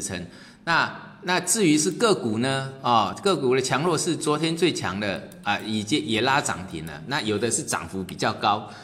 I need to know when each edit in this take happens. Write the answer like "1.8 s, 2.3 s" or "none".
none